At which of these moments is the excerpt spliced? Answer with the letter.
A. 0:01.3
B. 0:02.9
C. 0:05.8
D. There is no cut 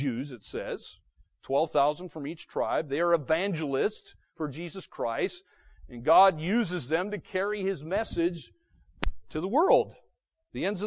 D